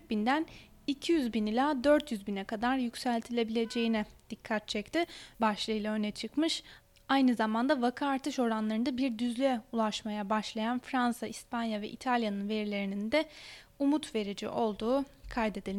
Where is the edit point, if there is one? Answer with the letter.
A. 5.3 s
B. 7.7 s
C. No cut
A